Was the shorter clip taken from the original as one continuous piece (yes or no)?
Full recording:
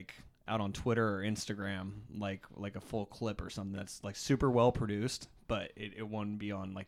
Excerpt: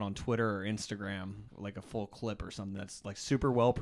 no